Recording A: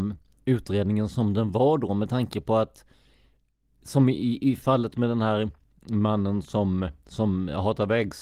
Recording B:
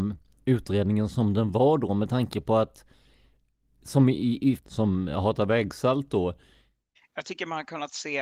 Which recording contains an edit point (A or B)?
B